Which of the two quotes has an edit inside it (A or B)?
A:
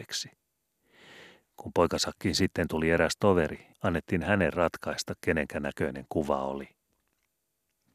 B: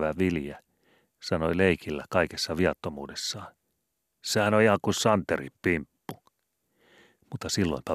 A